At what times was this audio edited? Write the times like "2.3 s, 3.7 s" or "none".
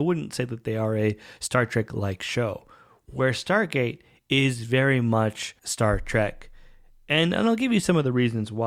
5.6 s